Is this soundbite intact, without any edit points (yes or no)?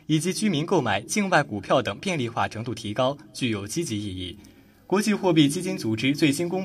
yes